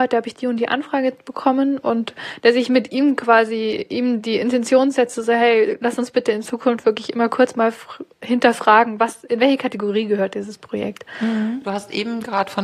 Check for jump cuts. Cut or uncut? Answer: uncut